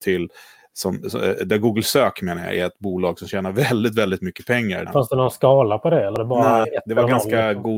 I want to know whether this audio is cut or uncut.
cut